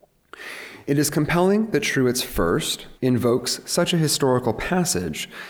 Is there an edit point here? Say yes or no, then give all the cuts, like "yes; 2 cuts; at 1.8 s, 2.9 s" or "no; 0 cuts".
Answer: yes; 1 cut; at 3.0 s